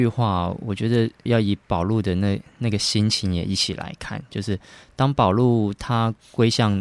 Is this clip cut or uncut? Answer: cut